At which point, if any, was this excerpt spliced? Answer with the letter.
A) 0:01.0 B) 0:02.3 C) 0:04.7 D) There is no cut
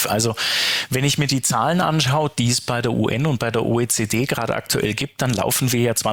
D